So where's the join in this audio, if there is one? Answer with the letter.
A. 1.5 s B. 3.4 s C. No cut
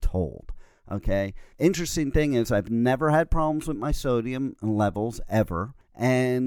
A